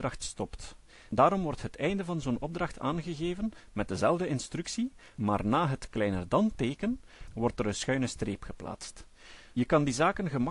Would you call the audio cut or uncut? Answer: cut